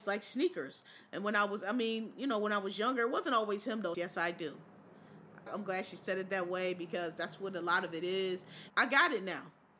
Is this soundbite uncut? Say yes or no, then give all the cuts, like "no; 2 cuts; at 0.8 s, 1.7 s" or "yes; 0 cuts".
no; 3 cuts; at 3.9 s, 5.5 s, 8.7 s